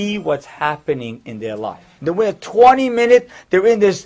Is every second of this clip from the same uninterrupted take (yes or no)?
no